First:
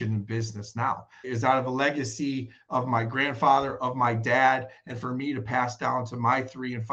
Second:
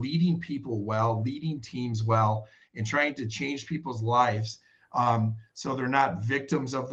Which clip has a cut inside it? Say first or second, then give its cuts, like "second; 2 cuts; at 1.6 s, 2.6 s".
first; 1 cut; at 1.2 s